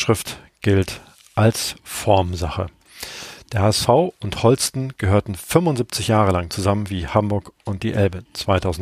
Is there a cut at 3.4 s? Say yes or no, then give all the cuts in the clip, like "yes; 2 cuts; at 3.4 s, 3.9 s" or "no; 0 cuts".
no; 0 cuts